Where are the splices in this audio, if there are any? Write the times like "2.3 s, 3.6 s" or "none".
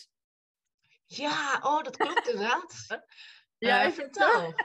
2.9 s